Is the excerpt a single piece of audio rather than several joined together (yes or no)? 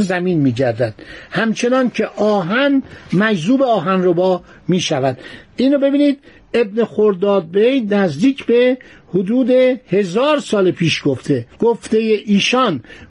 no